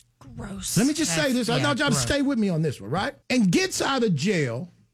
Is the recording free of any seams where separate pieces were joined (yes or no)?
no